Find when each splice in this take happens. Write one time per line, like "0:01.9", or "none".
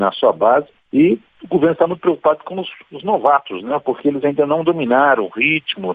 none